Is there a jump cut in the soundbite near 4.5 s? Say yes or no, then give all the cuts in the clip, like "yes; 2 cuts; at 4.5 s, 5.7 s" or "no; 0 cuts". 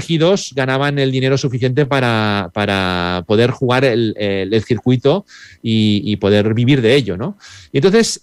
no; 0 cuts